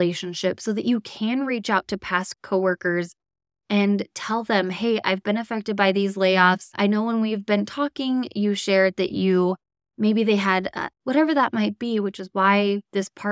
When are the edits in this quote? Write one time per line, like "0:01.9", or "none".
0:10.9